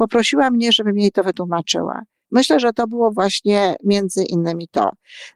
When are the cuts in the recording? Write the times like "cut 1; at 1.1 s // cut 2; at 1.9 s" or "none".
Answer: cut 1; at 2.2 s